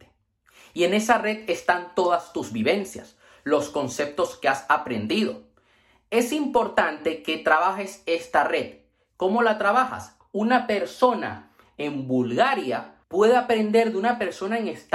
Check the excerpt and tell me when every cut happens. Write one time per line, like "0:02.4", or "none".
0:10.2
0:13.0